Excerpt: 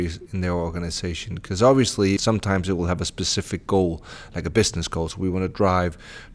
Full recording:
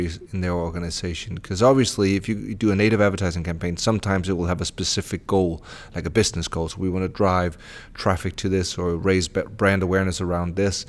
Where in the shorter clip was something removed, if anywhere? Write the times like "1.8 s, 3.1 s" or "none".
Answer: 2.2 s